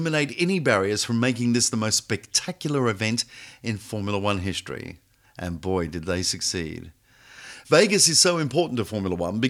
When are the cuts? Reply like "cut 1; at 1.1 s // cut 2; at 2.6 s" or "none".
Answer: none